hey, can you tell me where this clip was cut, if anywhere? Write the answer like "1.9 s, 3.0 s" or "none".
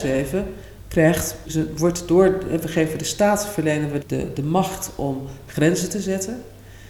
1.5 s, 4.0 s